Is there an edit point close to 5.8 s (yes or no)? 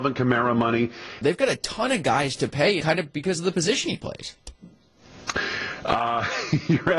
no